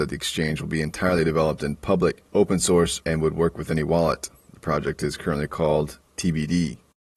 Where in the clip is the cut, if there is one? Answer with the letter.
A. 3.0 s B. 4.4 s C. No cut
A